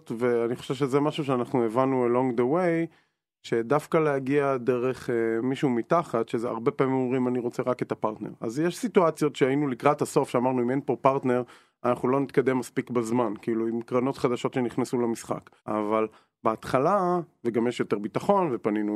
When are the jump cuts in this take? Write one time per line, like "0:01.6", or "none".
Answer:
0:15.6